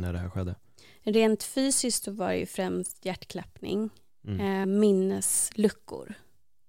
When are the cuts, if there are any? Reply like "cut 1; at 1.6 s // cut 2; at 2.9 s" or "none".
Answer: cut 1; at 4.6 s